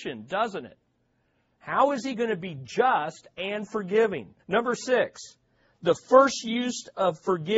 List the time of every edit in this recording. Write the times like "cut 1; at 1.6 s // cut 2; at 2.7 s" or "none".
cut 1; at 4.4 s

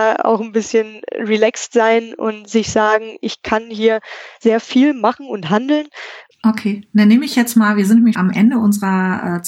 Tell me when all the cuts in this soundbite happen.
cut 1; at 6.3 s // cut 2; at 8.1 s

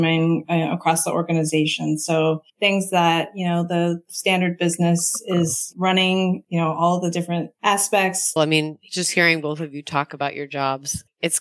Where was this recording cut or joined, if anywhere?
cut 1; at 2.5 s // cut 2; at 8.4 s

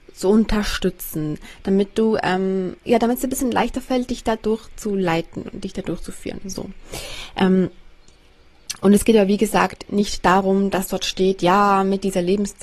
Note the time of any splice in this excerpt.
cut 1; at 2.8 s

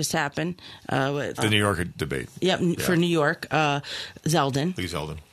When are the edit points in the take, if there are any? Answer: cut 1; at 1.4 s // cut 2; at 4.2 s

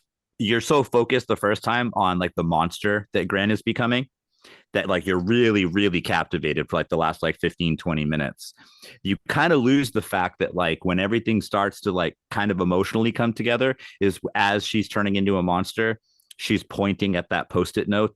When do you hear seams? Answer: none

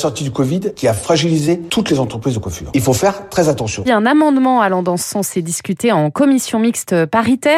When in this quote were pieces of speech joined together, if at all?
cut 1; at 3.8 s

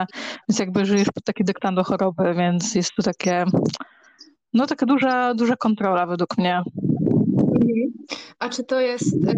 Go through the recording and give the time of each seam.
none

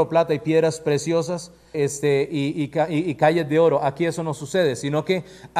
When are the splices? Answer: cut 1; at 1.7 s

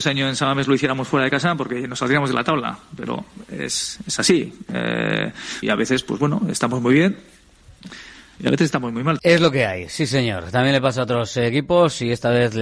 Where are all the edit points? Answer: cut 1; at 5.6 s // cut 2; at 9.2 s

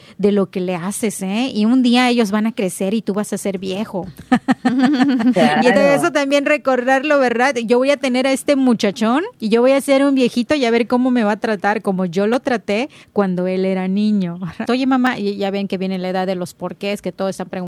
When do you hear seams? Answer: cut 1; at 9.4 s // cut 2; at 14.6 s

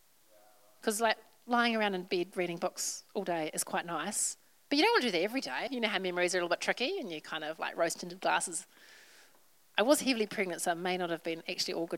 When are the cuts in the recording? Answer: cut 1; at 5.7 s

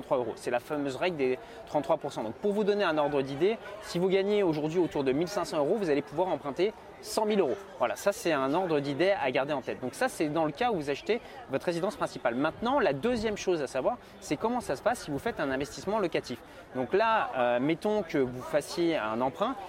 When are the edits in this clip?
none

